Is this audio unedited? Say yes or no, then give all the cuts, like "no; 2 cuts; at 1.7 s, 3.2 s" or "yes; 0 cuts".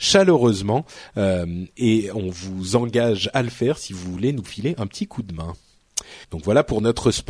no; 1 cut; at 6.2 s